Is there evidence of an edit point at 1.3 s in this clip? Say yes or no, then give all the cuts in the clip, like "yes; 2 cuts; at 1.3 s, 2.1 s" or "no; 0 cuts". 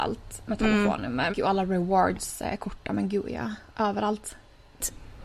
yes; 1 cut; at 1.3 s